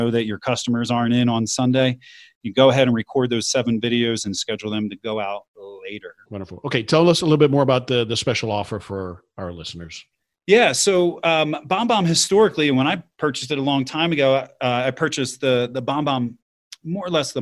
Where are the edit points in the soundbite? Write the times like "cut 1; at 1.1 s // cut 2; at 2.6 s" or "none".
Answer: cut 1; at 6.3 s